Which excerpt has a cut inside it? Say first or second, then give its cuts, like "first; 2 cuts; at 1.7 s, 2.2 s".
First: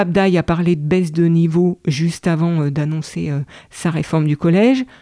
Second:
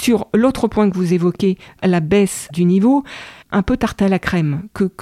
second; 1 cut; at 3.4 s